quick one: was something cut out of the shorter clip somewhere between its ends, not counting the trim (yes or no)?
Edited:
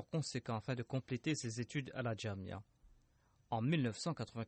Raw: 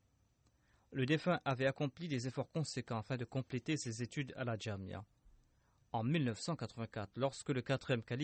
no